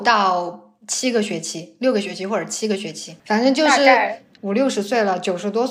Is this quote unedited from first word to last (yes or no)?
no